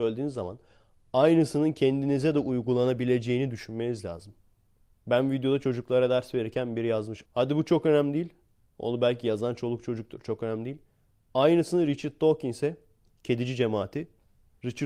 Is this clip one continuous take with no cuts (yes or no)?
no